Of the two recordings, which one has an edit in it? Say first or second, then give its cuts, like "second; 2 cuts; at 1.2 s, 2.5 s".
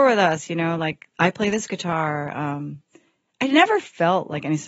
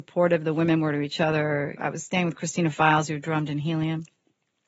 second; 1 cut; at 1.8 s